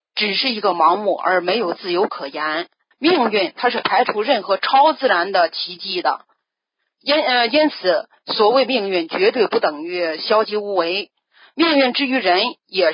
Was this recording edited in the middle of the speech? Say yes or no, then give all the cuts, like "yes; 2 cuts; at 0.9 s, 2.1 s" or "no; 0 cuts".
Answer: yes; 1 cut; at 2.9 s